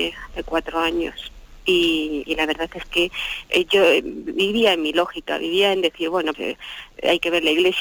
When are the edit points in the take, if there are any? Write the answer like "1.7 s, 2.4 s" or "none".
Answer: 6.3 s